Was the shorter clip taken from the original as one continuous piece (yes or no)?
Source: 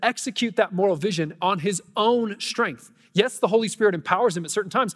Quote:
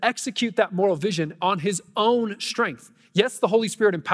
yes